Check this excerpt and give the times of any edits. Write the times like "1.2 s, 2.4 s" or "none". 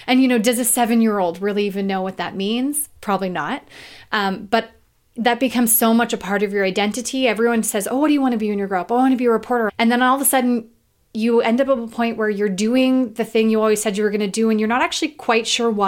9.7 s